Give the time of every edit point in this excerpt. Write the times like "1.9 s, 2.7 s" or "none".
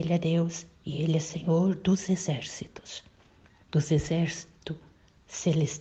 3.6 s